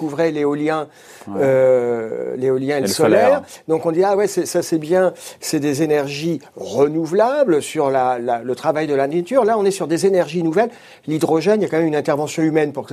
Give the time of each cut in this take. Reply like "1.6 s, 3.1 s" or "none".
none